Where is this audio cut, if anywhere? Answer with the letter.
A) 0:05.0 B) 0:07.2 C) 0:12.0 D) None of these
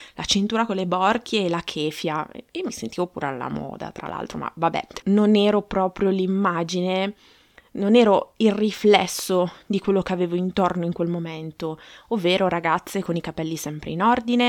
A